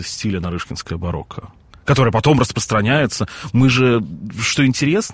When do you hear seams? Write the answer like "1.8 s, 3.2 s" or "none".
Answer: none